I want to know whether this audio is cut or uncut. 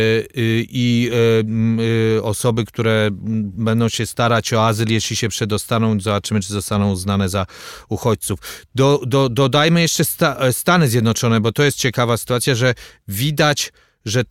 uncut